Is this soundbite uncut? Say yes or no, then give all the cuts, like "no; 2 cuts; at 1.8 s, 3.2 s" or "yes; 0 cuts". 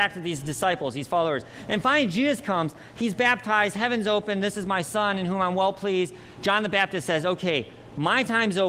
yes; 0 cuts